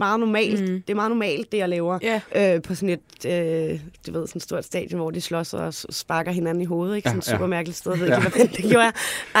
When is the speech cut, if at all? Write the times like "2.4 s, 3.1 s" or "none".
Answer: 2.3 s, 8.3 s

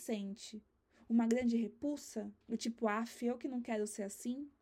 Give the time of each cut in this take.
2.4 s

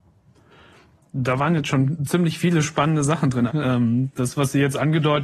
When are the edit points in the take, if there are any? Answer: 3.5 s

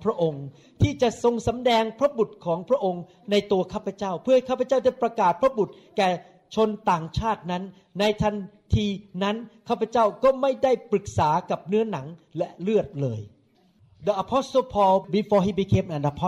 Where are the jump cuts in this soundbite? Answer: none

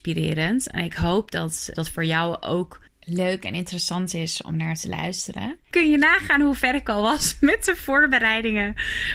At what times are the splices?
1.7 s, 5.7 s

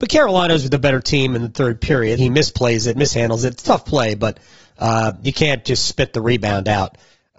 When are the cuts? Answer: 2.2 s

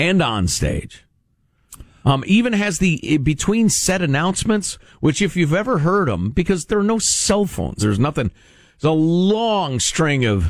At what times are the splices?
7.8 s

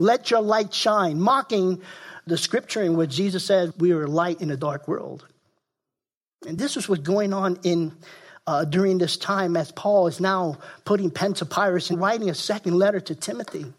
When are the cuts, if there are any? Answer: 11.9 s

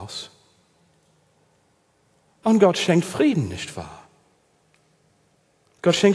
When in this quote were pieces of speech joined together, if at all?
3.0 s

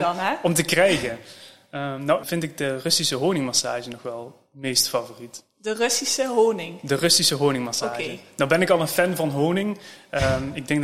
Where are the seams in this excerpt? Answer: 2.2 s

